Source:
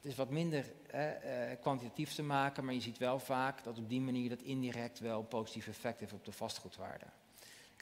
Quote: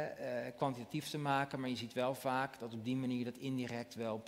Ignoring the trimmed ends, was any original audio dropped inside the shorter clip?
no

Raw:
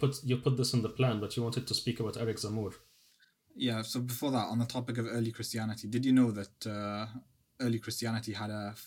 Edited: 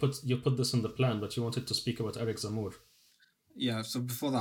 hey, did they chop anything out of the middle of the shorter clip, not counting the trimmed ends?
no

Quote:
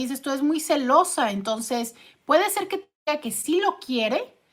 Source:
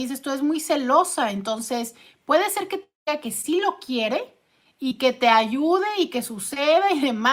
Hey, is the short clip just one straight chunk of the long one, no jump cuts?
yes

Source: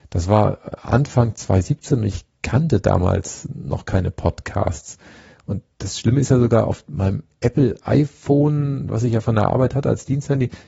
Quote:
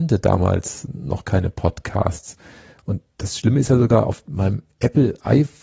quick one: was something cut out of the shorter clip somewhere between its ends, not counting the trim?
no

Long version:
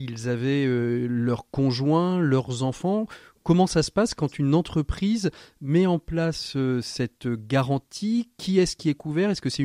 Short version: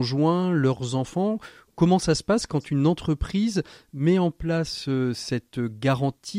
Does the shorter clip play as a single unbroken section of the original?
yes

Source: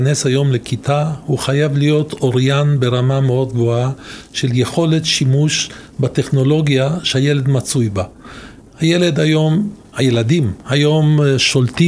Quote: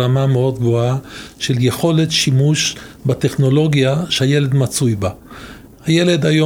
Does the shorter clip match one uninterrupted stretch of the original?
yes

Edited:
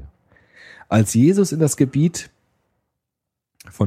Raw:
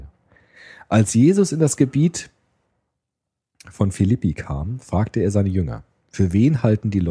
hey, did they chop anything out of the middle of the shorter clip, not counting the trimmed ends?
no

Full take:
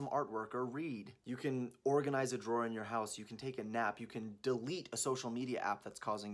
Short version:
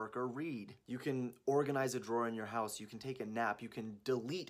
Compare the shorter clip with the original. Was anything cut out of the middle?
no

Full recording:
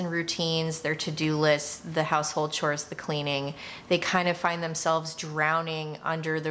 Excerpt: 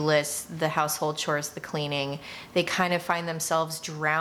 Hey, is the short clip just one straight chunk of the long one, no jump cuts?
yes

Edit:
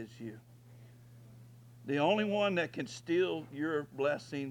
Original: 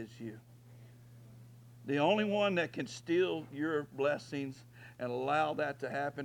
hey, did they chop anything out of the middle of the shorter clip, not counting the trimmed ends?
no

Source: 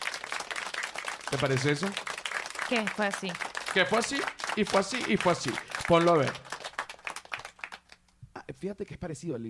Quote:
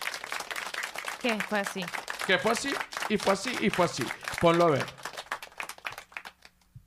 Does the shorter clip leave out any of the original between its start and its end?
yes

